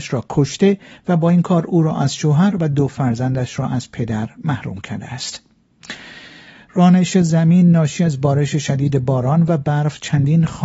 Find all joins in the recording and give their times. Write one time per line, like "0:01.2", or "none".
none